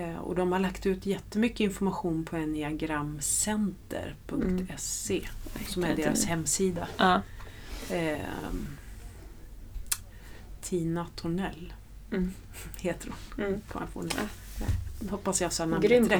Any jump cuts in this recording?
no; 0 cuts

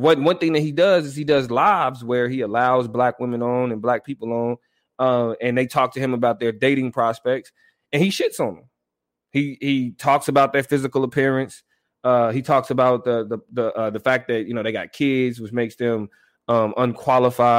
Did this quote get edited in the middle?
no; 0 cuts

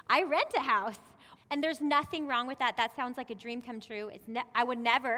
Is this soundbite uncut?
no; 1 cut; at 1.3 s

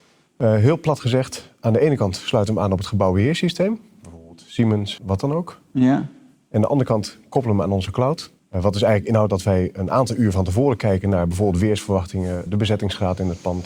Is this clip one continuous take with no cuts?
no; 3 cuts; at 5.0 s, 8.4 s, 12.5 s

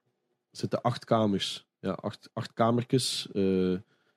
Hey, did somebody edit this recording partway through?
yes; 1 cut; at 1.7 s

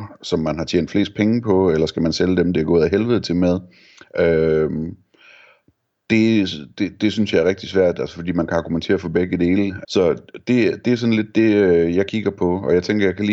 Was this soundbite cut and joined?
yes; 1 cut; at 9.8 s

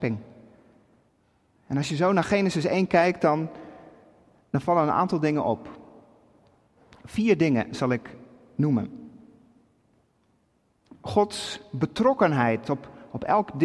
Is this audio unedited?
yes; 0 cuts

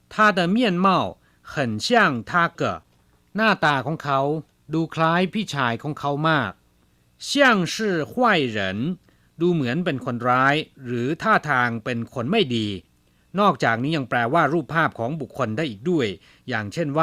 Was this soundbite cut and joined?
yes; 1 cut; at 2.5 s

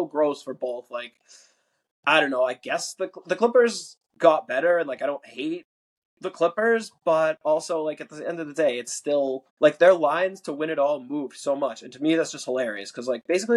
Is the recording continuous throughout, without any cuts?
no; 1 cut; at 9.5 s

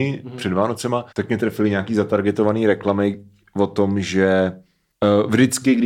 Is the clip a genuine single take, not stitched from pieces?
no; 1 cut; at 1.1 s

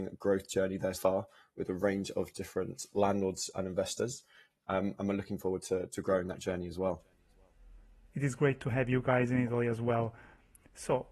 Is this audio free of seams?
no; 1 cut; at 0.9 s

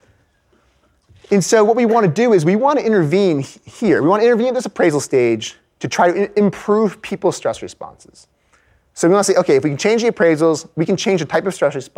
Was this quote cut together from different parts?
no; 0 cuts

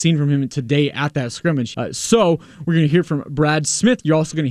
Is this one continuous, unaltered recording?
no; 1 cut; at 1.7 s

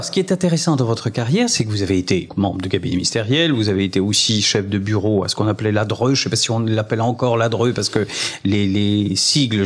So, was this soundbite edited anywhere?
yes; 1 cut; at 2.3 s

